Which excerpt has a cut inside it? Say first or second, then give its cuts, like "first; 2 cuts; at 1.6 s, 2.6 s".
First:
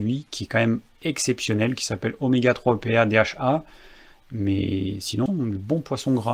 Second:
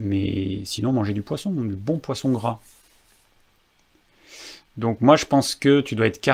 first; 2 cuts; at 4.2 s, 5.3 s